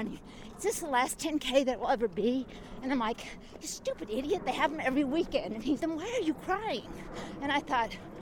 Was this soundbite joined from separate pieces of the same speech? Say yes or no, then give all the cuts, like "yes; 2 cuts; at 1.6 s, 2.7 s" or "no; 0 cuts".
yes; 1 cut; at 5.8 s